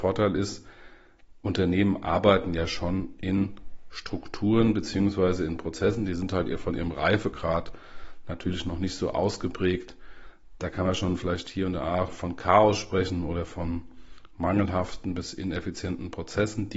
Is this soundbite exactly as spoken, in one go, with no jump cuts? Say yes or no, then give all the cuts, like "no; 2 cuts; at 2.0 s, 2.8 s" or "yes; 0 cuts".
yes; 0 cuts